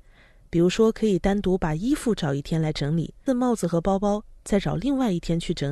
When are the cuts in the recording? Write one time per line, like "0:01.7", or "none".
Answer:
0:03.3